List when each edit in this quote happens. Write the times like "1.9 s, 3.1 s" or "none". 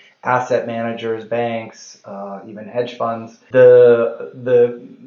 3.5 s